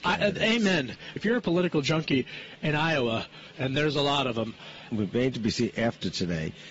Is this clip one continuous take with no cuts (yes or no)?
no